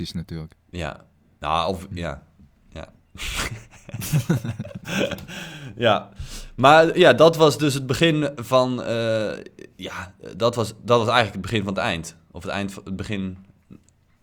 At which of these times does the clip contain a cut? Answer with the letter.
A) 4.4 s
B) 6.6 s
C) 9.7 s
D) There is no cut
D